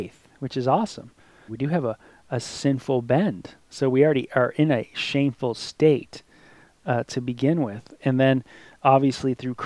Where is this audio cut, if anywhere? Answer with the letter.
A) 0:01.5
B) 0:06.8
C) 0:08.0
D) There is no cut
A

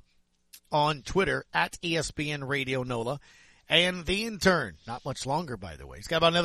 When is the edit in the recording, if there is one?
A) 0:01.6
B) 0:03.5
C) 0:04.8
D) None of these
D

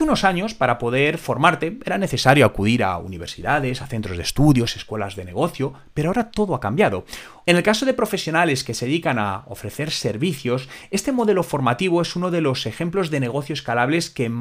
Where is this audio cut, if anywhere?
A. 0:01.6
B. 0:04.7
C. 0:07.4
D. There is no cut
C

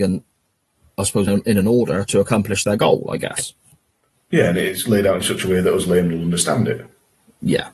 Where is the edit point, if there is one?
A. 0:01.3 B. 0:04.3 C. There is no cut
A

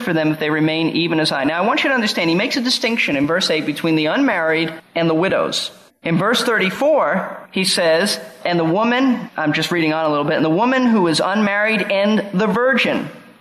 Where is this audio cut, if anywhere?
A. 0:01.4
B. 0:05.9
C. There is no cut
B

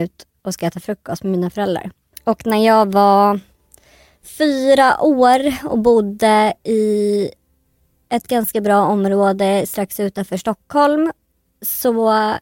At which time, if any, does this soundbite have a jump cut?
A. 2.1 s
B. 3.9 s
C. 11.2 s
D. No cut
A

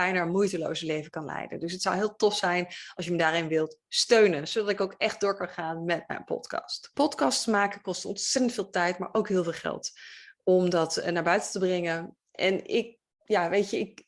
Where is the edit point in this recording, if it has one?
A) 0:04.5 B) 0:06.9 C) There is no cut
B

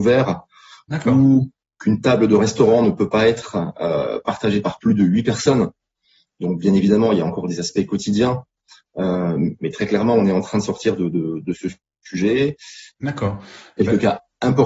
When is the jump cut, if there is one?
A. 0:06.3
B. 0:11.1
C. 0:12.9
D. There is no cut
C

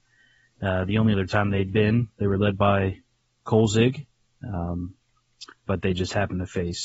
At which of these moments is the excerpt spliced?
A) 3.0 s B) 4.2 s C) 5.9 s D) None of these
D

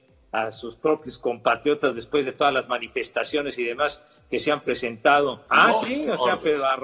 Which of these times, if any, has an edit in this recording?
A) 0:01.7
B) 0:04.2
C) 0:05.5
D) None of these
C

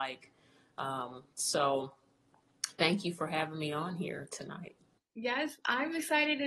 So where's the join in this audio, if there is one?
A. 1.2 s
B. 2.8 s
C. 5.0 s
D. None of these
C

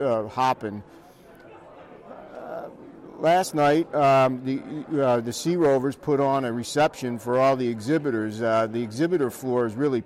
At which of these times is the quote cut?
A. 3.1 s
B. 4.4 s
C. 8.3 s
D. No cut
D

